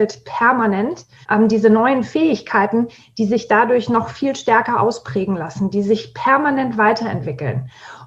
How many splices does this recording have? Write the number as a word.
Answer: one